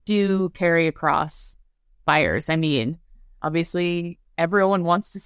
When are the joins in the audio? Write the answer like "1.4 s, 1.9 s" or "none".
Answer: none